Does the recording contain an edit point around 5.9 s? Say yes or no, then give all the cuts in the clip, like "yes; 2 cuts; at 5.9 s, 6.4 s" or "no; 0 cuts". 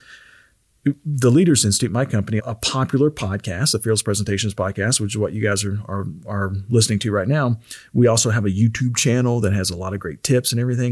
no; 1 cut; at 2.4 s